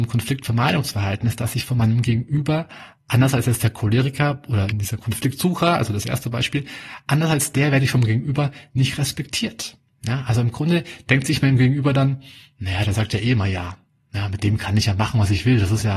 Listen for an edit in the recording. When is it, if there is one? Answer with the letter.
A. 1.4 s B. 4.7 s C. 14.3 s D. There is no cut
B